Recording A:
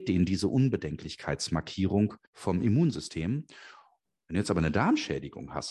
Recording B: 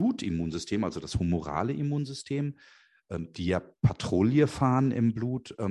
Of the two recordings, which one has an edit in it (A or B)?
A